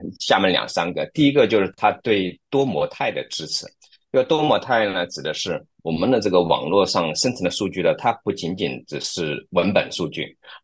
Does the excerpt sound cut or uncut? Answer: uncut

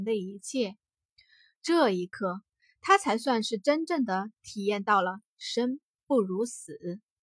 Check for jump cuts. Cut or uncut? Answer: uncut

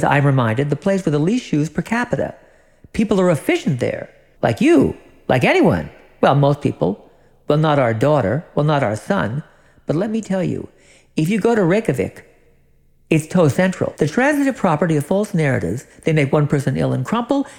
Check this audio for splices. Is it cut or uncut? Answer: cut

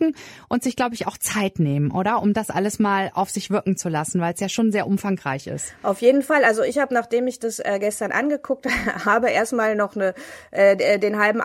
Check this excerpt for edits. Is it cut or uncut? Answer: uncut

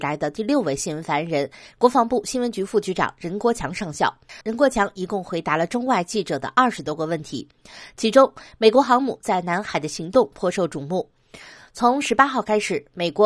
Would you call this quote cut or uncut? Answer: cut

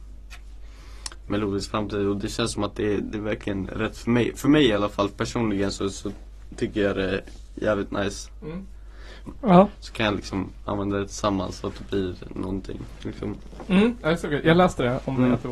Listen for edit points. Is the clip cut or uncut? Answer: cut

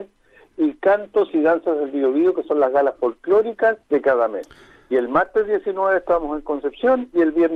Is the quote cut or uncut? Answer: cut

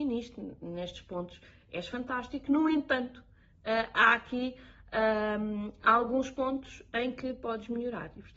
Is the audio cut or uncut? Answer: uncut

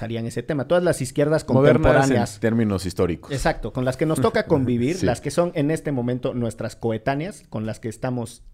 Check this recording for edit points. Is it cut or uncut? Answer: uncut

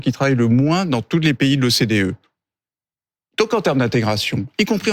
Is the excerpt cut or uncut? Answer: uncut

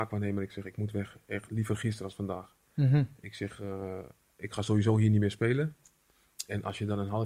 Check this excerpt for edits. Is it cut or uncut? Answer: uncut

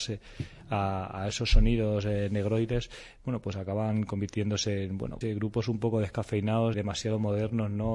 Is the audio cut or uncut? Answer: cut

